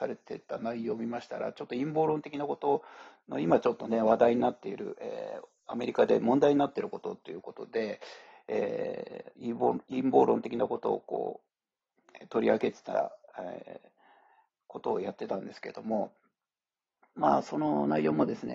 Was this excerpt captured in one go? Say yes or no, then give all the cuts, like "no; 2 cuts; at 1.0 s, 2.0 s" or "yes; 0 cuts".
yes; 0 cuts